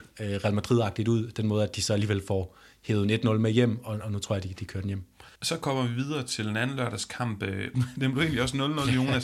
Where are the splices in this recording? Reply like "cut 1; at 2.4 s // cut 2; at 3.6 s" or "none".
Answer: cut 1; at 5.4 s // cut 2; at 7.7 s